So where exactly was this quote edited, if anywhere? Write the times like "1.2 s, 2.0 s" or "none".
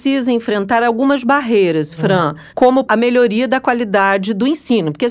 2.9 s